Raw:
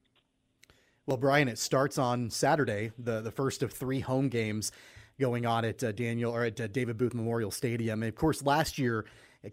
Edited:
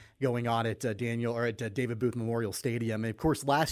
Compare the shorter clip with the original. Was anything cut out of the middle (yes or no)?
no